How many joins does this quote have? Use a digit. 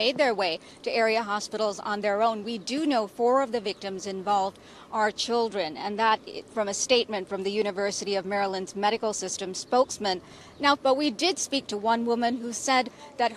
1